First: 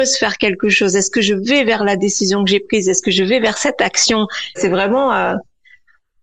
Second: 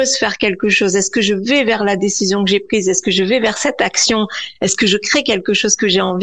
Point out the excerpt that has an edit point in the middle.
first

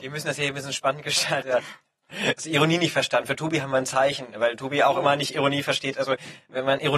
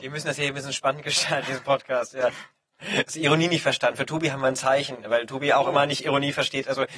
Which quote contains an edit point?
first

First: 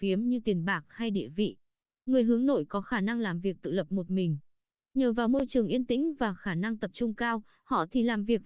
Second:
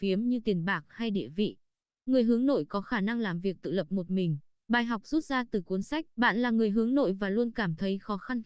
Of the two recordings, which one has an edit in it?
second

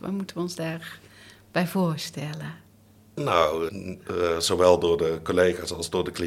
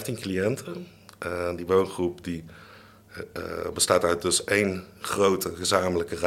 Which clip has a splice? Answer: first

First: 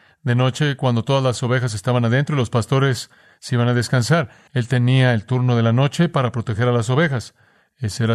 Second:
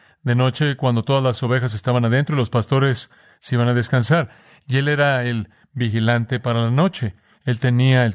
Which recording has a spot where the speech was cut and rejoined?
first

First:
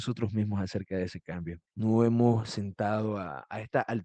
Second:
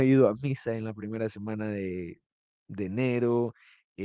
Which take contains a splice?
first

